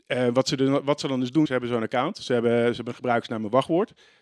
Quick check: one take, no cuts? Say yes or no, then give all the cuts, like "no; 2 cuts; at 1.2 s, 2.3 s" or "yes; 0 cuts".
no; 1 cut; at 1.5 s